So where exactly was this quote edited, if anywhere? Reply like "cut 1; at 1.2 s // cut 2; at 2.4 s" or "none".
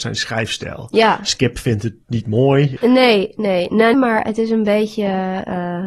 cut 1; at 2.8 s // cut 2; at 3.9 s

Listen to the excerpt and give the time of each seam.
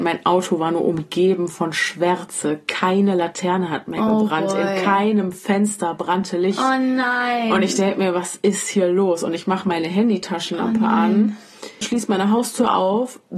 cut 1; at 11.8 s

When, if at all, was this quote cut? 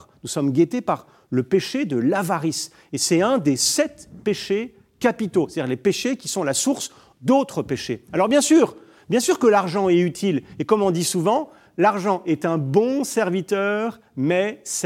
none

